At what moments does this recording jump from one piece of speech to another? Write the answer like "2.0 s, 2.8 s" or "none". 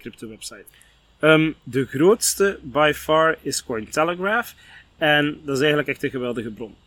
none

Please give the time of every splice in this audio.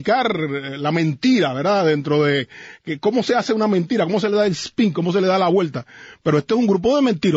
none

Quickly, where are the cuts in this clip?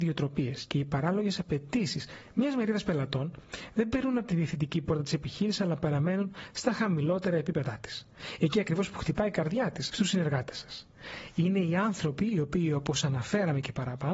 9.9 s

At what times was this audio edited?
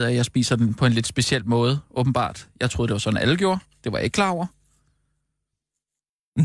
none

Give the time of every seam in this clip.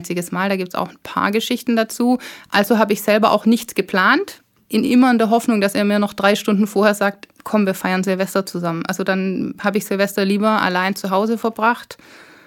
none

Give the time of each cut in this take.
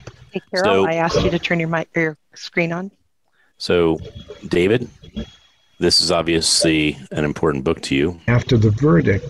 8.3 s

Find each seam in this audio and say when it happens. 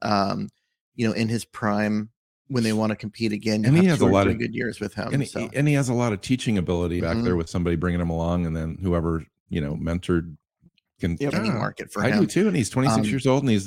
7.0 s, 11.3 s

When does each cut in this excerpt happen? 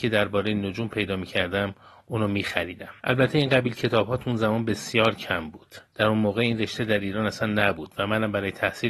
3.0 s, 5.9 s

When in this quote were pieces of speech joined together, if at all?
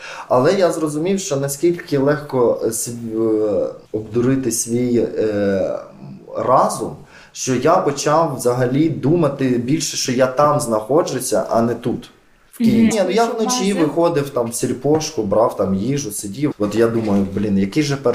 3.8 s, 12.9 s, 16.5 s

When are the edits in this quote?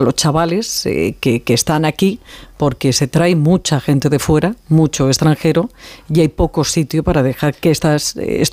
none

